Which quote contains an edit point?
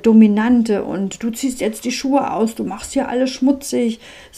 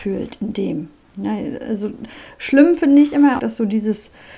second; 1 cut; at 3.4 s

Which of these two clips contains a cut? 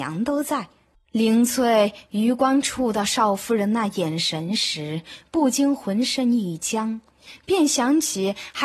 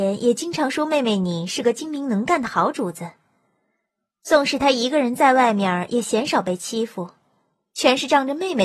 first; 1 cut; at 0.9 s

